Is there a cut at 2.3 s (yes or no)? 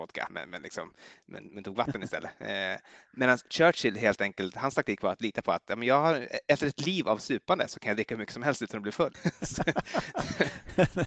no